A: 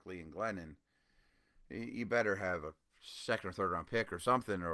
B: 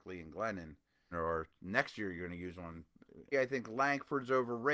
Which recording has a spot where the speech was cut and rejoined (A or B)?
B